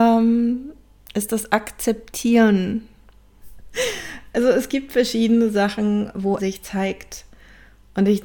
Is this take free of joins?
no; 2 cuts; at 3.4 s, 6.4 s

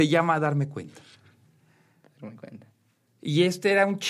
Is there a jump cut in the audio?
no; 0 cuts

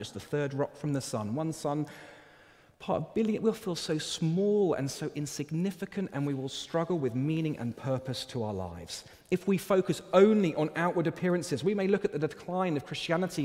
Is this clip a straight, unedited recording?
yes; 0 cuts

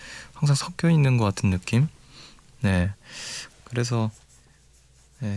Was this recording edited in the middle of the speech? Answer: yes; 1 cut; at 3.5 s

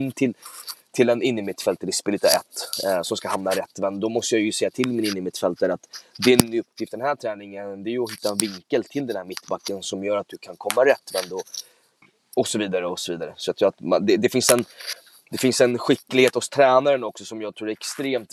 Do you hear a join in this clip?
no; 0 cuts

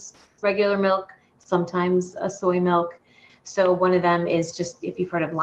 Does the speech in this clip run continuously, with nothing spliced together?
no; 1 cut; at 3.3 s

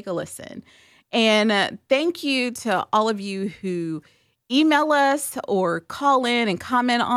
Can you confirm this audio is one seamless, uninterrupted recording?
yes; 0 cuts

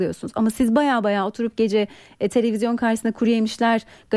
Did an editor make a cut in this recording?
no; 0 cuts

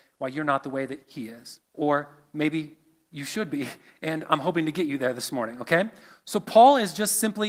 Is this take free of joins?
no; 1 cut; at 1.6 s

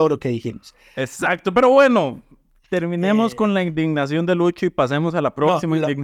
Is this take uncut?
yes; 0 cuts

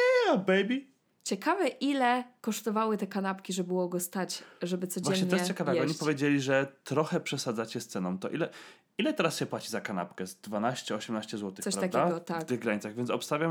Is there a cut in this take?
no; 0 cuts

